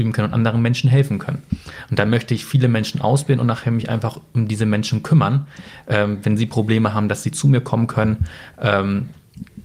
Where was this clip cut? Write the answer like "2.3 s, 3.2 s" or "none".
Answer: none